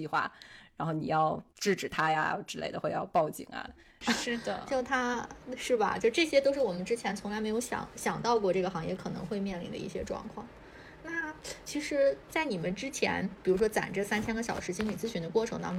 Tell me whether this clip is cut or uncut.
cut